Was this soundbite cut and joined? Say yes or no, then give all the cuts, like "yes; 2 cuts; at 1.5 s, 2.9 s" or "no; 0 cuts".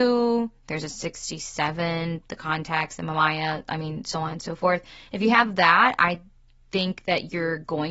no; 0 cuts